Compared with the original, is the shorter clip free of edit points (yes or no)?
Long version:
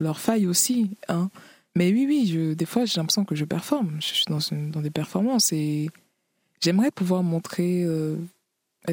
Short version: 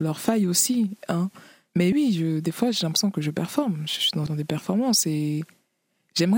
no